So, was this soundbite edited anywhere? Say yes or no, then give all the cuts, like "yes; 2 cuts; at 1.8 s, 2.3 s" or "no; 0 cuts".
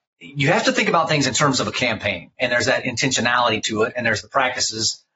yes; 1 cut; at 2.3 s